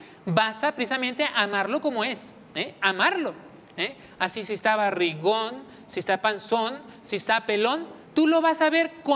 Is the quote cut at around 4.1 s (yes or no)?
no